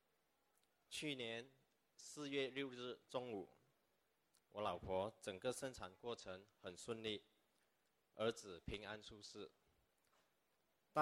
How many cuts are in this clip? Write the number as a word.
one